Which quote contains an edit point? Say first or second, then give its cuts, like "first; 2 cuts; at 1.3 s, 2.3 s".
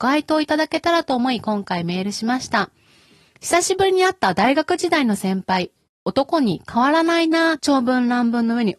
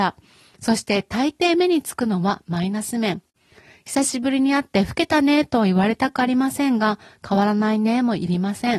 first; 1 cut; at 7.6 s